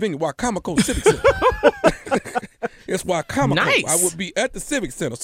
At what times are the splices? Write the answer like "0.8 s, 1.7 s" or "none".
none